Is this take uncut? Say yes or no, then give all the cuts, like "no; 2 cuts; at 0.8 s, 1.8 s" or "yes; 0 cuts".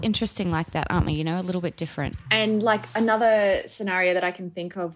yes; 0 cuts